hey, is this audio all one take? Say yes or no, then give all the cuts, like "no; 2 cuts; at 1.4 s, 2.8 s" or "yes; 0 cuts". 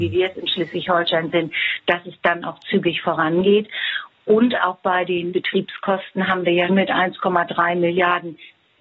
no; 2 cuts; at 5.3 s, 6.7 s